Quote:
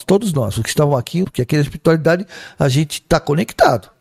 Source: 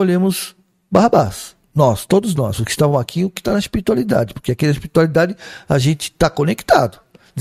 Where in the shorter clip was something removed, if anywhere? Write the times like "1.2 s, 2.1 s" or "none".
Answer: 1.2 s